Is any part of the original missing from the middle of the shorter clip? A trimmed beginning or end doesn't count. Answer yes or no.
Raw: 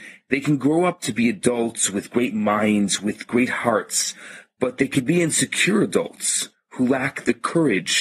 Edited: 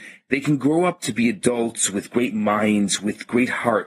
no